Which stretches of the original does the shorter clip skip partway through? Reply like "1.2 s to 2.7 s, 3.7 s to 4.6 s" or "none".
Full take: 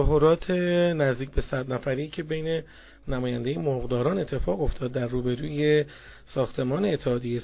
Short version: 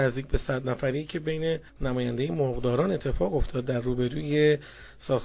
2.7 s to 3.0 s